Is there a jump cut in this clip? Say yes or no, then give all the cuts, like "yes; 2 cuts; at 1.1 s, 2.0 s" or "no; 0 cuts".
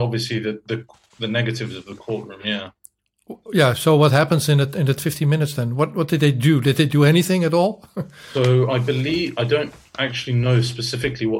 no; 0 cuts